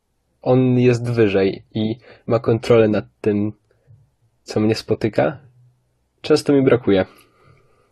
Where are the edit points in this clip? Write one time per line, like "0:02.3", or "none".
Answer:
none